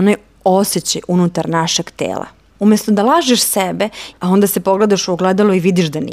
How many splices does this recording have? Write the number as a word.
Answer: two